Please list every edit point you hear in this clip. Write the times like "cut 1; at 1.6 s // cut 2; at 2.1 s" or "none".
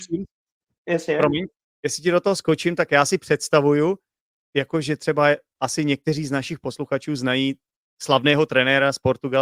none